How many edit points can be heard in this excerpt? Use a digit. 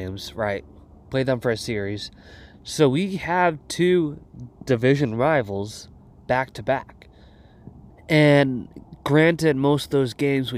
2